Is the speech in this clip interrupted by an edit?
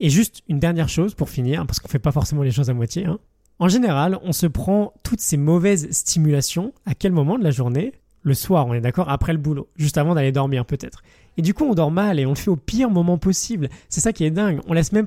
no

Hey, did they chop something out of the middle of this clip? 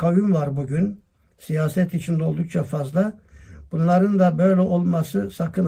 no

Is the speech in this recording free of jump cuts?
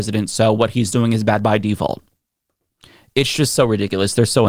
yes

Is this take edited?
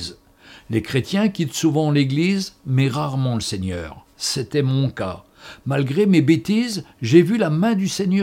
no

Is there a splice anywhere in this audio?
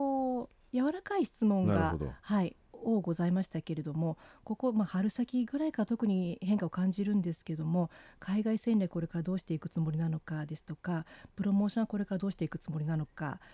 no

